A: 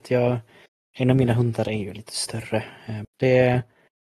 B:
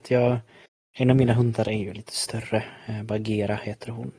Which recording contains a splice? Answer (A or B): A